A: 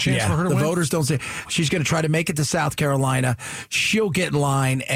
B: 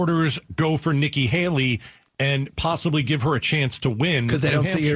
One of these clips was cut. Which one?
A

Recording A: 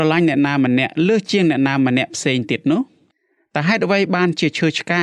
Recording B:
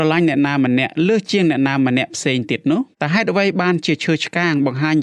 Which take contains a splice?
B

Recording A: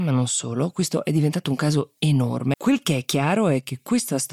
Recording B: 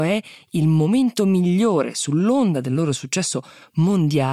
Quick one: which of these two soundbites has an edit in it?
A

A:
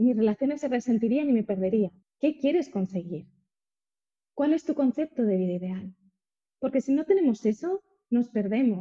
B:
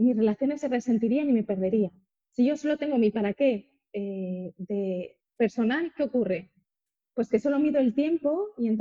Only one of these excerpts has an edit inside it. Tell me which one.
A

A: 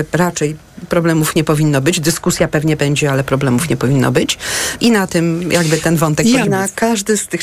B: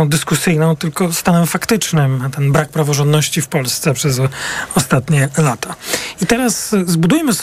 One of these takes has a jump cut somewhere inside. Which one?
A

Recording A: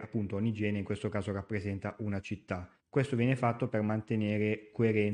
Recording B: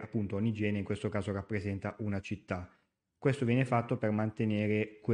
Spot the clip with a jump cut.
A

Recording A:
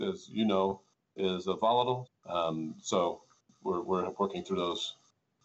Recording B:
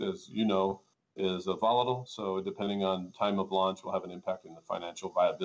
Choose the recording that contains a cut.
A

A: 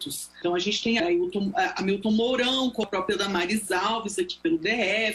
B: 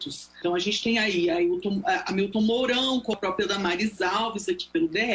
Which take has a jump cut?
A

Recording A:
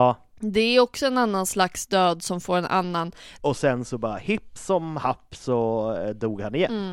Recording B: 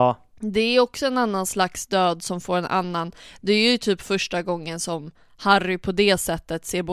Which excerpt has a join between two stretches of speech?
A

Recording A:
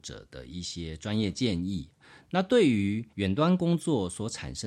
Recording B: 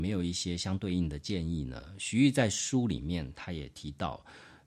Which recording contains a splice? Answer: A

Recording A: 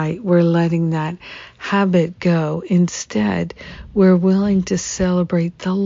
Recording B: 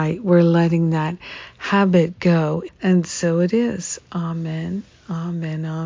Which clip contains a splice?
B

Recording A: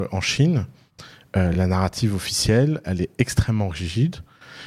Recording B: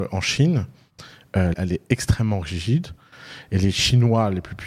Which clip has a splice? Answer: B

